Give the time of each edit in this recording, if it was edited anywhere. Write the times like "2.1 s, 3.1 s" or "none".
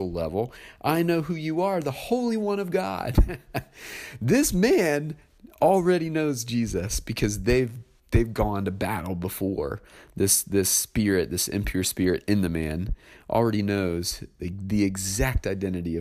none